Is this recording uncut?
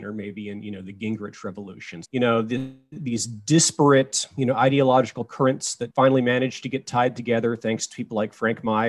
no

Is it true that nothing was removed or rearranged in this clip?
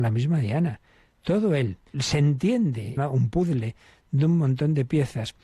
no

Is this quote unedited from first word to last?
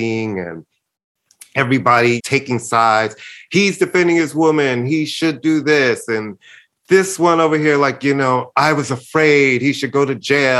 no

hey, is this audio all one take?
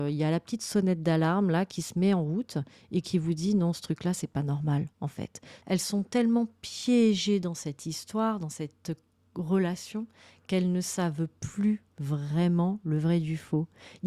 no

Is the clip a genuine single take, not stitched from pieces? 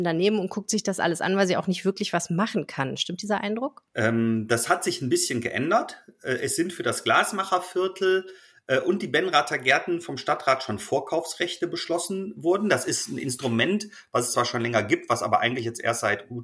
yes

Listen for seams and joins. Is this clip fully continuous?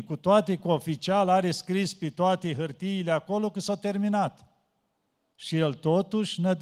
yes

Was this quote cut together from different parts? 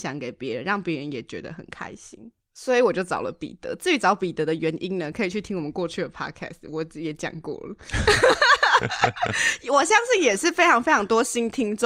no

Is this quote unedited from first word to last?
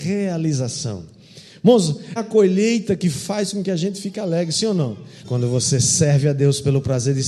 no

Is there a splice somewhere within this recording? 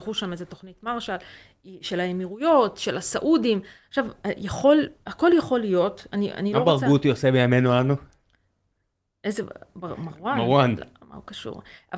no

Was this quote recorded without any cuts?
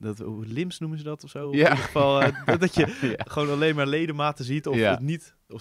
yes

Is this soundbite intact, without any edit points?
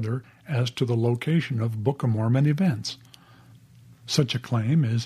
yes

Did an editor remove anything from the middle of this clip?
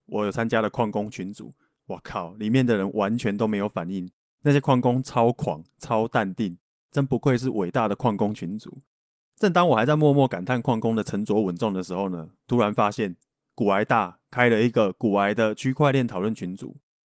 no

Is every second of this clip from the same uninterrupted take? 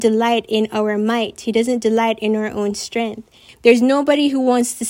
no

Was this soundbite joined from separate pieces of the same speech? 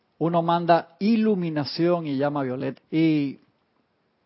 yes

